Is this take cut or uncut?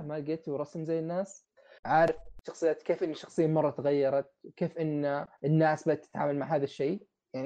cut